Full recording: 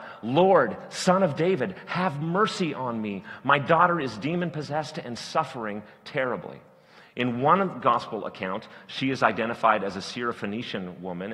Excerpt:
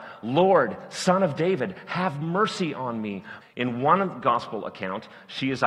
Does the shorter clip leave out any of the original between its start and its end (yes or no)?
yes